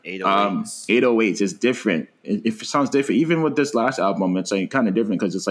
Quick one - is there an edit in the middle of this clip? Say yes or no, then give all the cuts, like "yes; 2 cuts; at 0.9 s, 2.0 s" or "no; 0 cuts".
no; 0 cuts